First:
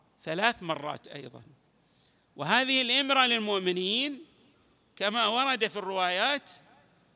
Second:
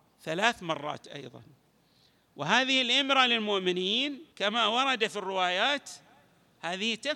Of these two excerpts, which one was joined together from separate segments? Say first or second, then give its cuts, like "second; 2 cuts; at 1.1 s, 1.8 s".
second; 1 cut; at 4.3 s